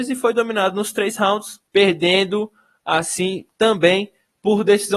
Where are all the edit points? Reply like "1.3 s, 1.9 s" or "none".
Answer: 1.7 s